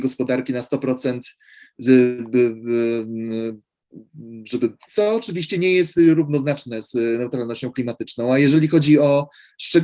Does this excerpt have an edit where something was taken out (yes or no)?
yes